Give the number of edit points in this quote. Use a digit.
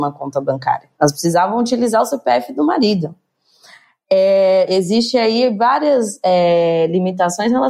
2